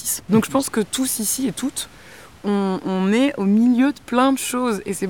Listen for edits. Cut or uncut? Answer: cut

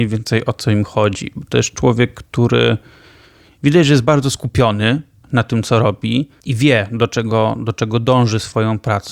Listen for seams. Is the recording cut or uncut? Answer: uncut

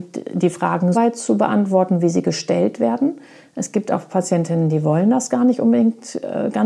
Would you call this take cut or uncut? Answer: cut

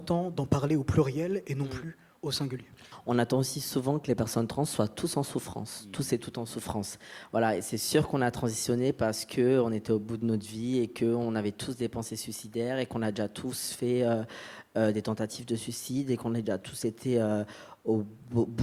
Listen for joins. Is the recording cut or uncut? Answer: uncut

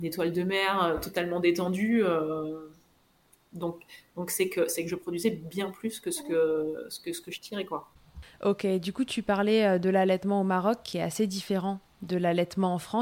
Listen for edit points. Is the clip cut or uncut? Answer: uncut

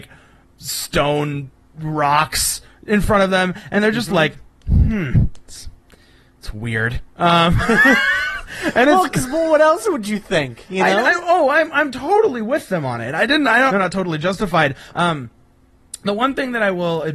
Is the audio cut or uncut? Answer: cut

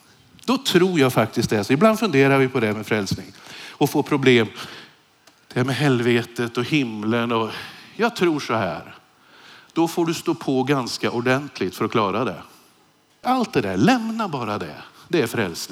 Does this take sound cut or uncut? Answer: cut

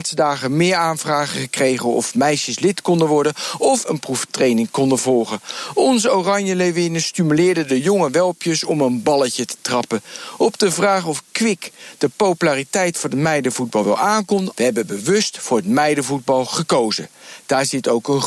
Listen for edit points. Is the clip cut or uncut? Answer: cut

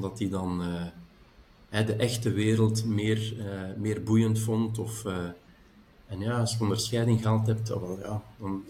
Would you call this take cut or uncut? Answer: uncut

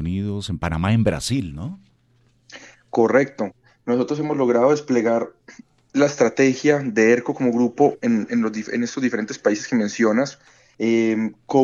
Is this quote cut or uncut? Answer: cut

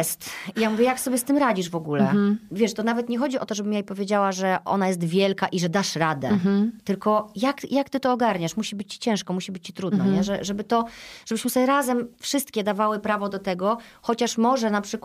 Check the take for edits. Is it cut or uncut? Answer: uncut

